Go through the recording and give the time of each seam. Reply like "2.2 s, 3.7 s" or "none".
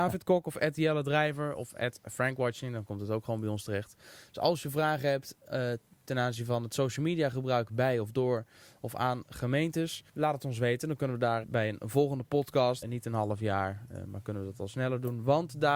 10.1 s, 11.4 s, 12.8 s